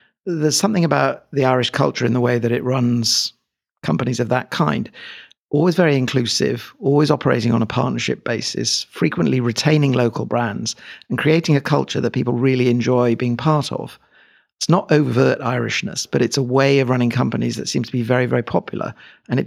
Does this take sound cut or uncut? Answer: uncut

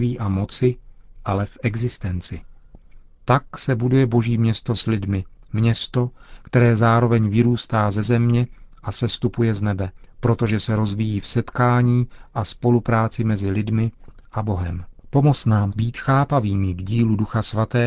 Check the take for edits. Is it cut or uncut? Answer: cut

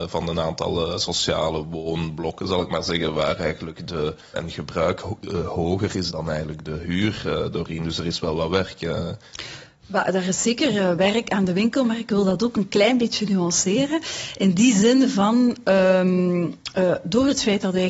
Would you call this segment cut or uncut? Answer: cut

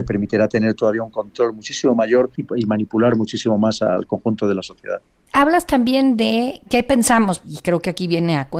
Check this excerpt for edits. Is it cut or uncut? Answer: uncut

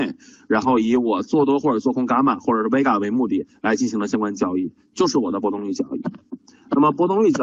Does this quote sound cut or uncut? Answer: uncut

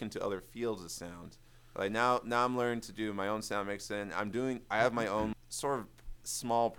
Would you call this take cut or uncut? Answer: cut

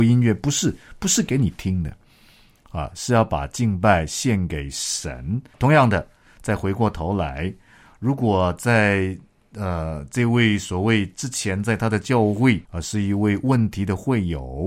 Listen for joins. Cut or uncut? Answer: cut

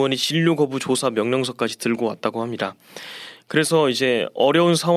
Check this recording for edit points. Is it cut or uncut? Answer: uncut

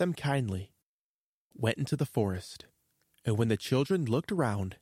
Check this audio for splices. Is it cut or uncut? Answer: cut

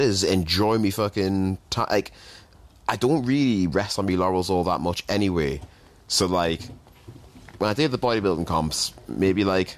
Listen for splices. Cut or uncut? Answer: uncut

